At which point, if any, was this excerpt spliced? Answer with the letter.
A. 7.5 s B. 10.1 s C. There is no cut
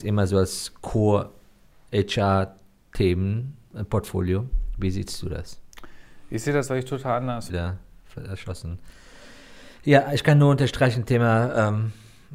A